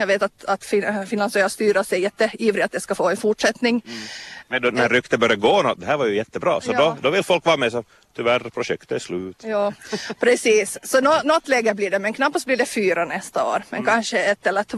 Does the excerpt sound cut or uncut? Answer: uncut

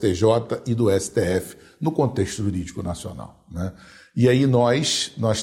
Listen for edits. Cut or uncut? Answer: uncut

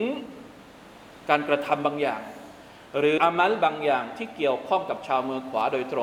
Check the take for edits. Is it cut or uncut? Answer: cut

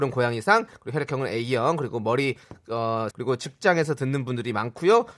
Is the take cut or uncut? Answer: cut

